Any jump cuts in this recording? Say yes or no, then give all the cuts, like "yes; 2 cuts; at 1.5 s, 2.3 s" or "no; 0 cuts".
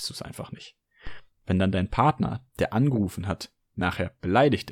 no; 0 cuts